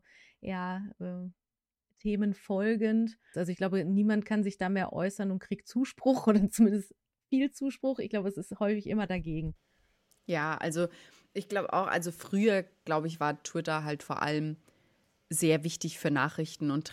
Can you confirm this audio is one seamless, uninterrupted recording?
no; 1 cut; at 3.3 s

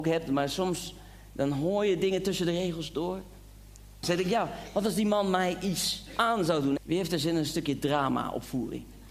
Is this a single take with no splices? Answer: no; 2 cuts; at 4.0 s, 6.8 s

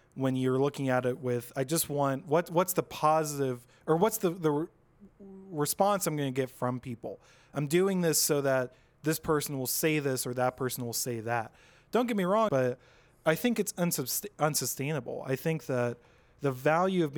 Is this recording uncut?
no; 1 cut; at 12.5 s

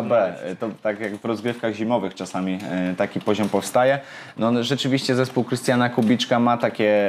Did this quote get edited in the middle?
no; 0 cuts

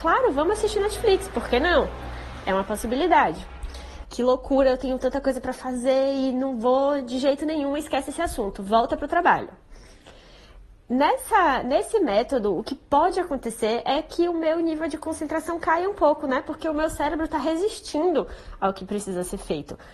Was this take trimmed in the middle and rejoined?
yes; 1 cut; at 4.0 s

